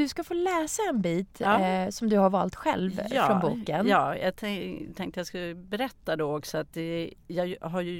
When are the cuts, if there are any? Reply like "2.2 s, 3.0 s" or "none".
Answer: none